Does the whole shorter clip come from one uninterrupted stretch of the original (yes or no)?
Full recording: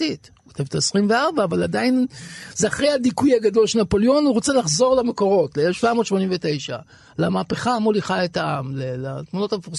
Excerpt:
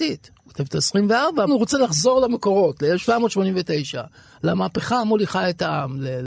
no